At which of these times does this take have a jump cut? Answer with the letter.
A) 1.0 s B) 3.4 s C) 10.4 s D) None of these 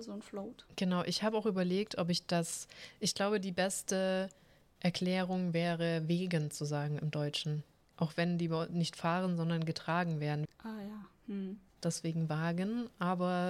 C